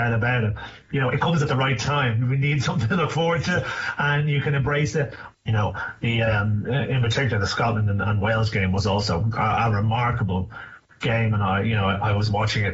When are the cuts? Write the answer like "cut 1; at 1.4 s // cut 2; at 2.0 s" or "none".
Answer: cut 1; at 2.2 s // cut 2; at 5.3 s